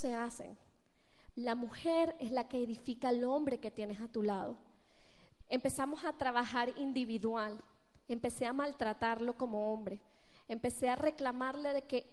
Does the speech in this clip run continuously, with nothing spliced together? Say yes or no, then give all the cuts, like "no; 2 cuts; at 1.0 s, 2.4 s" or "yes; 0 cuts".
no; 2 cuts; at 1.3 s, 5.4 s